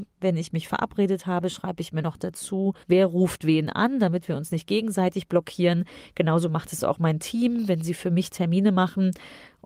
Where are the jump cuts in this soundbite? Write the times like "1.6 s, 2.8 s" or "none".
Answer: 2.8 s

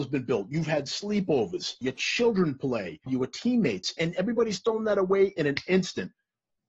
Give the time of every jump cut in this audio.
1.8 s, 3.1 s

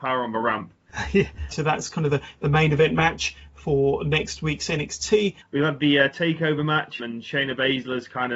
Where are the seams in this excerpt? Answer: 1.5 s, 5.4 s, 7.0 s

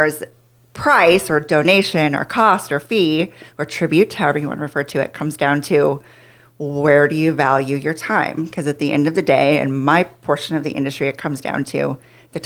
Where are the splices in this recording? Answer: none

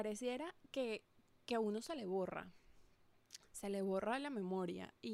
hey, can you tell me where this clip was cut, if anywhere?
none

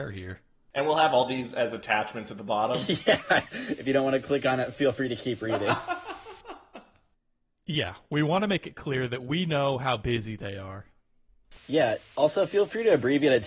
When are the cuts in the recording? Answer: 3.5 s

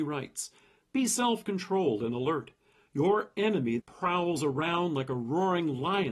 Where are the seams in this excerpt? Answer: 3.8 s

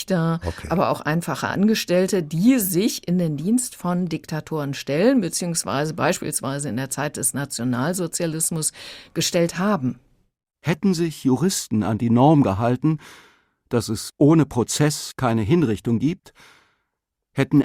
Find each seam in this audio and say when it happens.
none

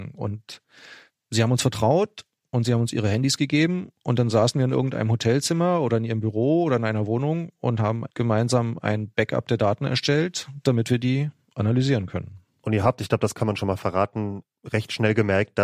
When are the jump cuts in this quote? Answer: none

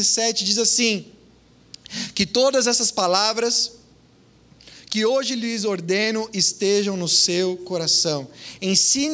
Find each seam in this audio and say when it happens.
none

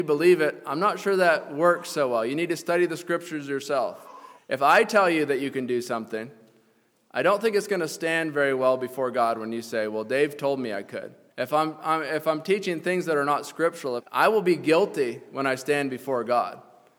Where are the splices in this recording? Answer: 4.4 s, 11.3 s, 14.0 s

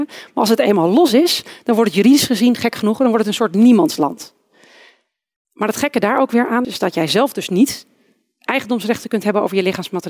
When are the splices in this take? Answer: 6.6 s

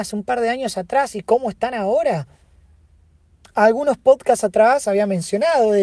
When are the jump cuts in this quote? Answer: 3.4 s, 4.8 s

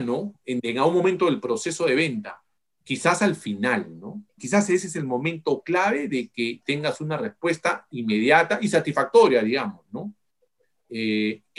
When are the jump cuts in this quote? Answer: 4.4 s

